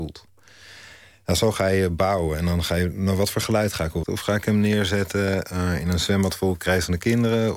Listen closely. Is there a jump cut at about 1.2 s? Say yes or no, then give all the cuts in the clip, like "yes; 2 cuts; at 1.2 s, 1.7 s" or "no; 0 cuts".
no; 1 cut; at 4.0 s